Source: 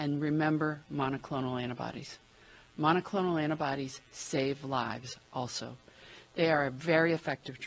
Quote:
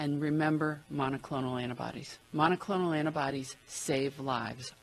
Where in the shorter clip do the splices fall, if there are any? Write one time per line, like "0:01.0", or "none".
0:02.2